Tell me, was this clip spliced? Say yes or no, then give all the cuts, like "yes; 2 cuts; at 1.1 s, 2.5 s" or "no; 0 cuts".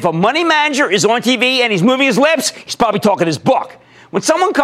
no; 0 cuts